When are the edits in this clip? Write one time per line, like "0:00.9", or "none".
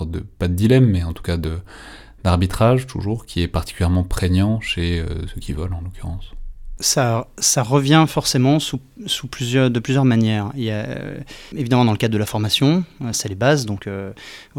0:05.3
0:11.5
0:13.1